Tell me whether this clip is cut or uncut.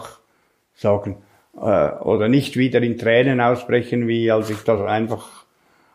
uncut